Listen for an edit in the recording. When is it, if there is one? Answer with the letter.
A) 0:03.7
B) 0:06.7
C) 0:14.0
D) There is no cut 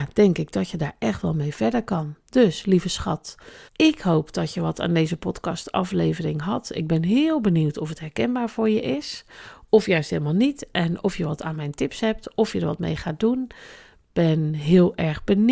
A